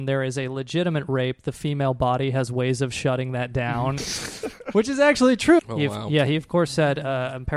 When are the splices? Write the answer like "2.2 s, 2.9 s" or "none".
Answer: 4.0 s, 5.6 s